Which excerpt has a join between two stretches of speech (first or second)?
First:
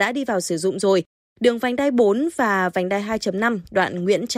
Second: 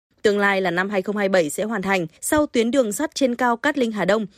second